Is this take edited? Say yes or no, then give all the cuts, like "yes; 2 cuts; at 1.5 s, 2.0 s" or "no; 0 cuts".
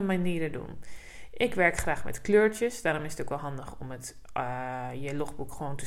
no; 0 cuts